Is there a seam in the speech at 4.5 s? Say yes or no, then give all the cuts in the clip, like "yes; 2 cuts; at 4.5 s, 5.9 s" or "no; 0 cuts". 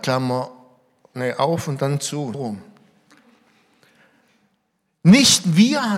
no; 1 cut; at 2.3 s